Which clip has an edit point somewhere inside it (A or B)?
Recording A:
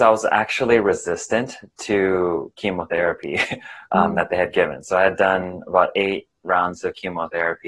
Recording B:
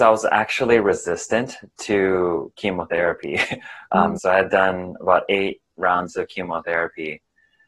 B